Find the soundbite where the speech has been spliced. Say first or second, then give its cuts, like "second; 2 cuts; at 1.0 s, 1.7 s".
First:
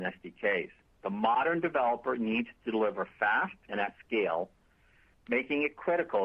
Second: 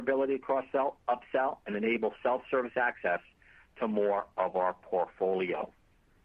first; 2 cuts; at 1.0 s, 3.7 s